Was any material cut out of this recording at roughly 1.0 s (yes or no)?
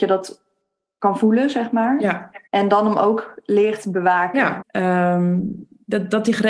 no